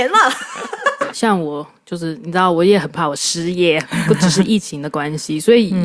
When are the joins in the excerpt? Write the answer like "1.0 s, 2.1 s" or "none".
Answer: 1.1 s